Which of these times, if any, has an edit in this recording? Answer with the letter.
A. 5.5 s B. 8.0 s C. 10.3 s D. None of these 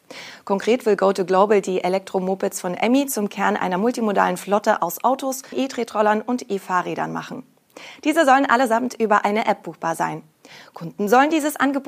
A